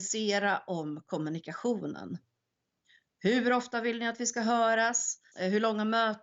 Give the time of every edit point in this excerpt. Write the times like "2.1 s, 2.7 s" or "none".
none